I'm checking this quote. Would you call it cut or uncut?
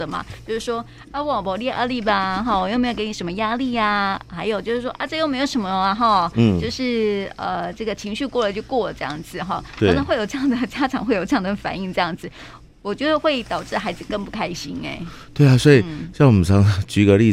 uncut